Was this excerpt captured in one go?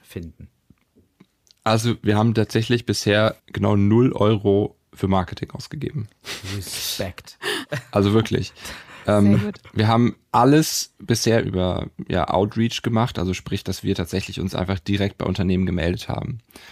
no; 1 cut; at 3.4 s

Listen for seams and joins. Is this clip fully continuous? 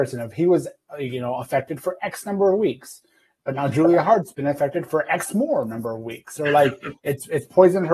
yes; 0 cuts

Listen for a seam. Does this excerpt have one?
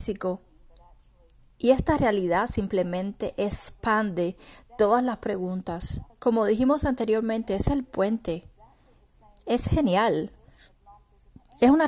yes; 1 cut; at 6.1 s

